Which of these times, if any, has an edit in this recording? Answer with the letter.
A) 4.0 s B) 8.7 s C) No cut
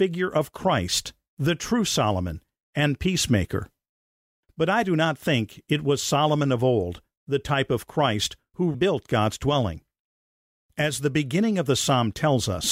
B